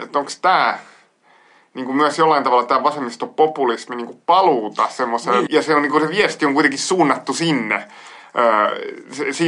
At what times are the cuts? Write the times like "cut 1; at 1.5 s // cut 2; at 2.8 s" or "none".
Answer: cut 1; at 5.5 s